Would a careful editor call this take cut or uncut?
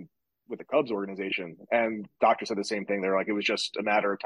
uncut